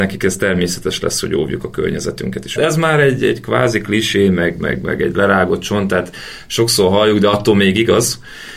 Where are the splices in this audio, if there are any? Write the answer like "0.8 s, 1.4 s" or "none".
2.6 s